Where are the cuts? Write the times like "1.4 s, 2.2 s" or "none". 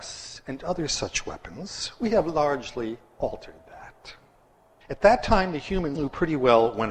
4.8 s, 5.9 s

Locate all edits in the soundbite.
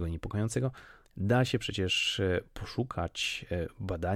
1.0 s

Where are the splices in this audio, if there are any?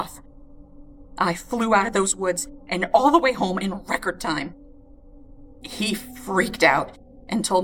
5.6 s

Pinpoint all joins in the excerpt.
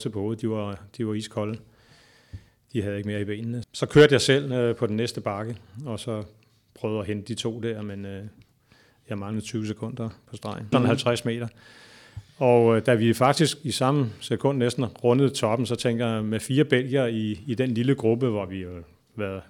3.6 s, 10.7 s

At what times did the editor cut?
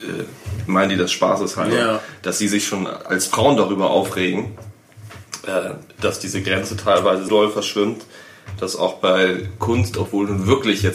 7.3 s

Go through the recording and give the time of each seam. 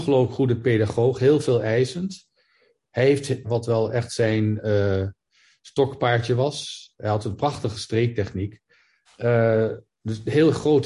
3.4 s, 9.1 s

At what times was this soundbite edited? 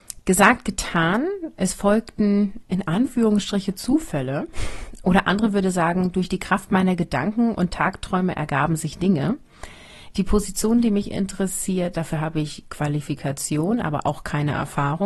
10.1 s

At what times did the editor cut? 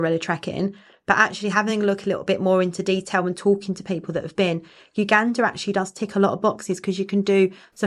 none

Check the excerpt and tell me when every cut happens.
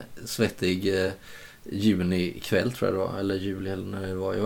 none

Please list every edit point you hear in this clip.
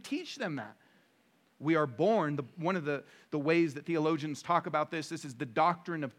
1.4 s

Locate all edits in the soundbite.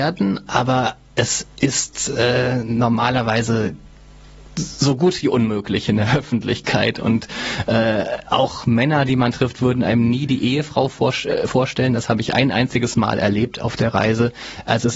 none

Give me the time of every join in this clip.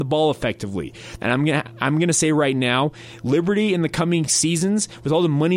1.2 s

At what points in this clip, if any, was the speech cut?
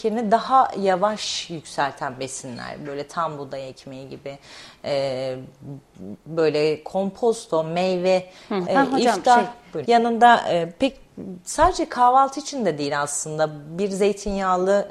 8.6 s, 9.8 s

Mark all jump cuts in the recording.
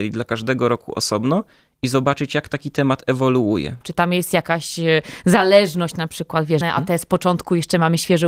3.8 s, 6.6 s

